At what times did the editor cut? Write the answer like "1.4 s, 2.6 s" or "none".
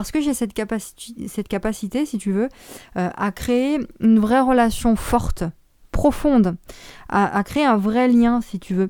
none